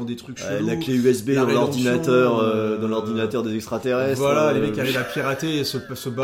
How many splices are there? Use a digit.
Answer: 0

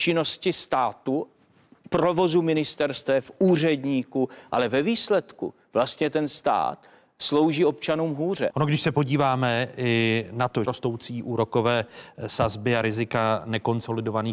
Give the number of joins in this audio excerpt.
2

